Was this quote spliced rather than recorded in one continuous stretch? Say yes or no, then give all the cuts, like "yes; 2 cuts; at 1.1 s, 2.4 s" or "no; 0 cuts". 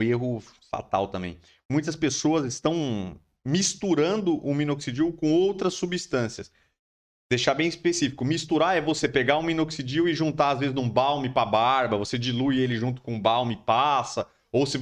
no; 0 cuts